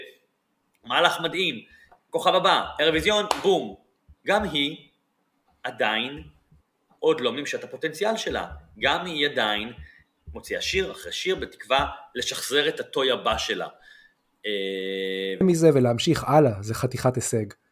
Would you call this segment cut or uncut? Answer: cut